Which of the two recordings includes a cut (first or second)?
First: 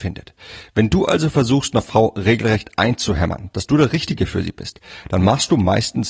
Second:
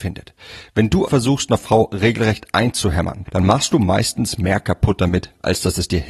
second